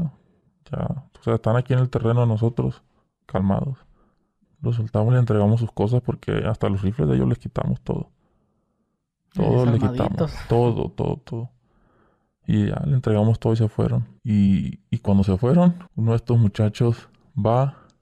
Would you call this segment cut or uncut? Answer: cut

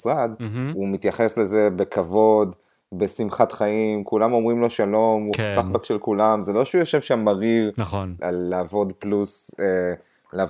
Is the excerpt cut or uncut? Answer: cut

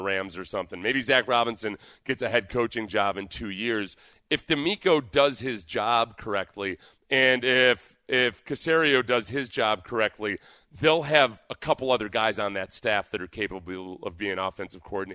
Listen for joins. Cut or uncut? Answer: uncut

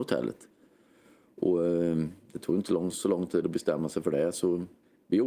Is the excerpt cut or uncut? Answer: uncut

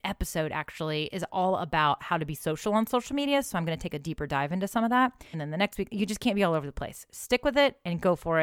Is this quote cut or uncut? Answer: cut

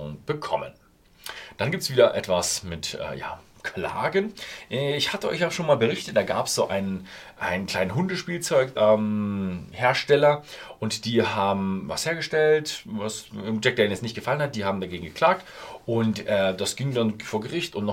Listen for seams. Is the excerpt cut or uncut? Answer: cut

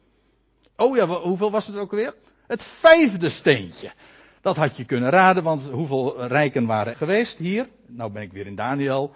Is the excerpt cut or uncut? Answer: cut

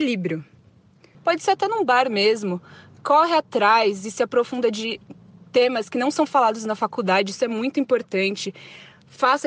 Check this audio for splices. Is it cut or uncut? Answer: cut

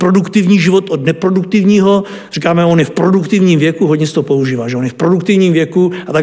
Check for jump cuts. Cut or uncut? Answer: uncut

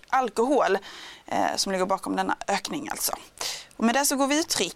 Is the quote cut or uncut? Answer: uncut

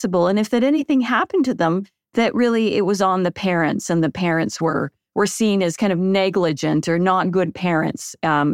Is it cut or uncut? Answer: uncut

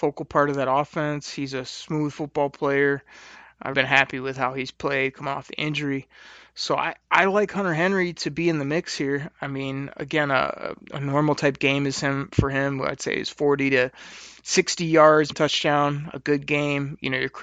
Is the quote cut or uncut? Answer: cut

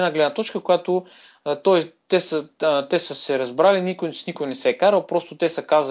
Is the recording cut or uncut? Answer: uncut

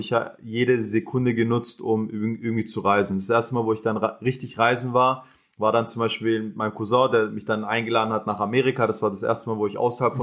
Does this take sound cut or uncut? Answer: uncut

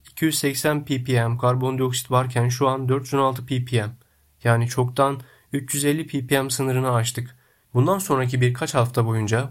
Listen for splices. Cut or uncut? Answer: cut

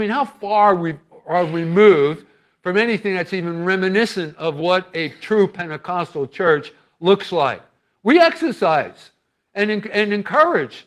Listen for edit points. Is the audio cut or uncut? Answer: uncut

